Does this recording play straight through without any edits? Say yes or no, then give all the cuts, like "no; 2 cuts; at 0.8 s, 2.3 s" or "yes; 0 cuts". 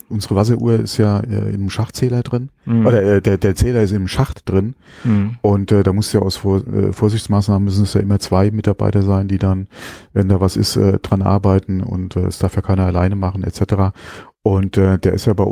yes; 0 cuts